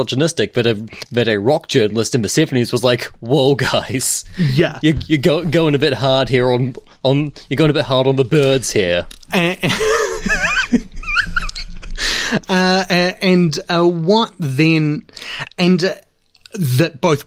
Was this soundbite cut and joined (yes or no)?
no